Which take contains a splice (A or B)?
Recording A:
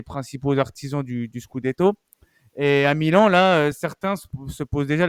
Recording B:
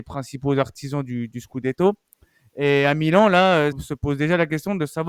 B